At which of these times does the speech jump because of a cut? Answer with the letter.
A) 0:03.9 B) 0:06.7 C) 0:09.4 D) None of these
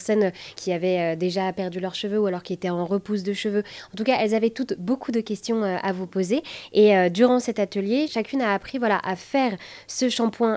D